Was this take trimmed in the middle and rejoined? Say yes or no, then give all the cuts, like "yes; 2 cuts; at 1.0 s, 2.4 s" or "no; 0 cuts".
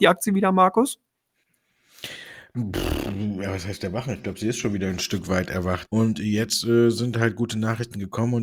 yes; 1 cut; at 5.9 s